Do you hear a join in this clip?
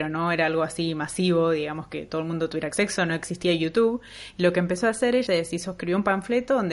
yes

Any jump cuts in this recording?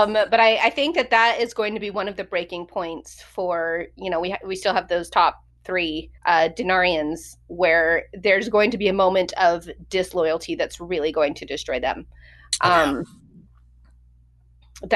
yes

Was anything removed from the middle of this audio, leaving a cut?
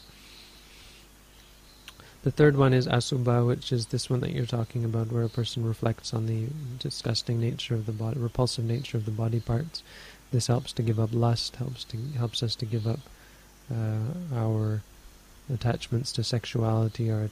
no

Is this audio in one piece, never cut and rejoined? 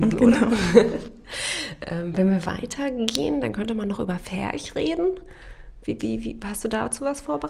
yes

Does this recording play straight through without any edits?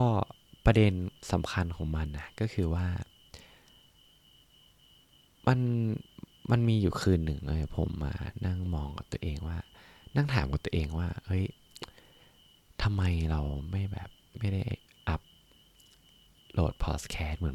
yes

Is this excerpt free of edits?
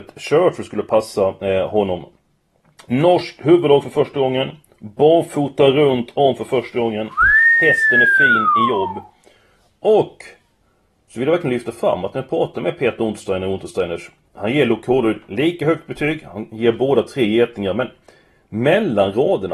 yes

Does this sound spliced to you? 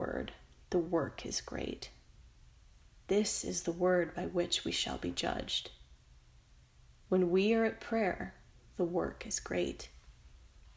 no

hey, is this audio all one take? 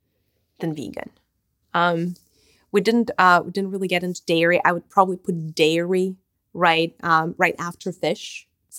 no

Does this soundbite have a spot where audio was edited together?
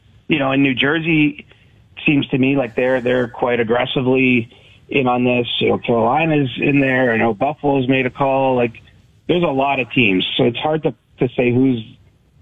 yes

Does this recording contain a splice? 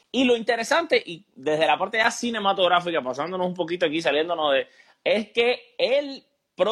no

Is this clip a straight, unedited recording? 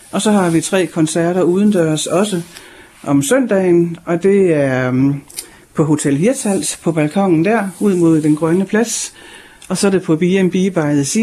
yes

